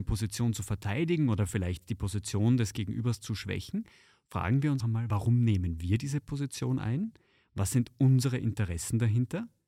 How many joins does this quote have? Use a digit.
1